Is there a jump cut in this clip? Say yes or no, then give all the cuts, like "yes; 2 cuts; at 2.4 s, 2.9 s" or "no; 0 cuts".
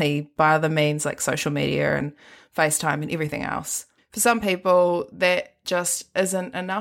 no; 0 cuts